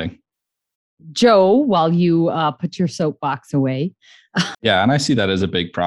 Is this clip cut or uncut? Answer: cut